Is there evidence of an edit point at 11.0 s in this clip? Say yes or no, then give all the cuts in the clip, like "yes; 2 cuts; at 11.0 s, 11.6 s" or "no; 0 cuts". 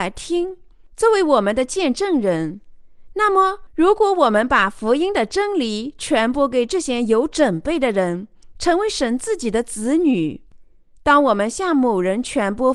no; 1 cut; at 8.5 s